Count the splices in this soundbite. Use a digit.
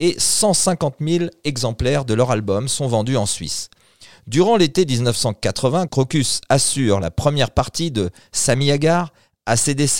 1